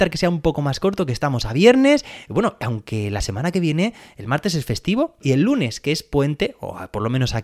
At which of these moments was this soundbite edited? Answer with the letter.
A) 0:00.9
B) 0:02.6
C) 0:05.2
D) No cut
C